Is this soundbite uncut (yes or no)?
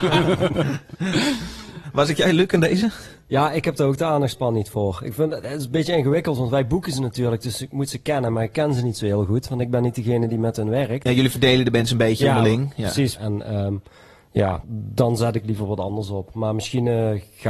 no